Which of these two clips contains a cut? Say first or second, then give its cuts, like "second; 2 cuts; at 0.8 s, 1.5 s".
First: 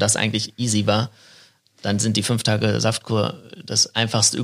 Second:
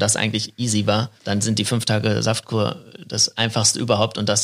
second; 1 cut; at 1.2 s